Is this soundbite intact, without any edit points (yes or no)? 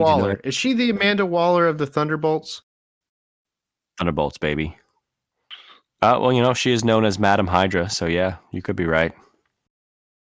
yes